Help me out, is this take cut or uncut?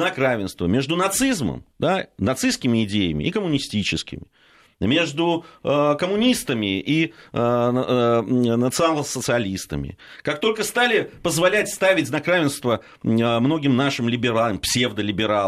cut